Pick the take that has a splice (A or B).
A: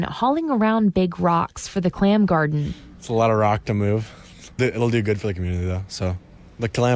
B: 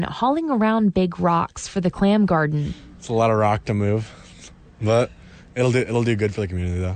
A